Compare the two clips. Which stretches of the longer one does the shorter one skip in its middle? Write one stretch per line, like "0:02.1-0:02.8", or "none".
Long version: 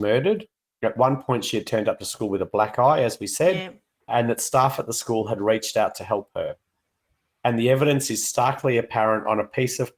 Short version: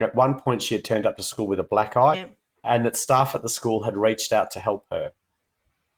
0:03.0-0:03.6